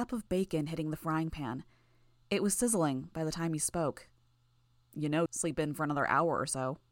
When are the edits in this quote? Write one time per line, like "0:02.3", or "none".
0:05.3